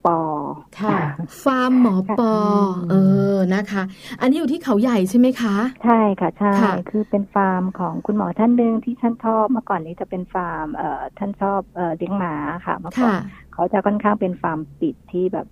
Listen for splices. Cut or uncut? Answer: cut